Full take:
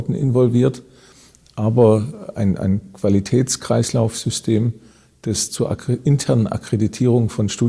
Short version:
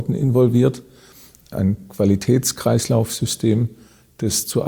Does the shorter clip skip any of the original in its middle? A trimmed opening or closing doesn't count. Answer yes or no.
yes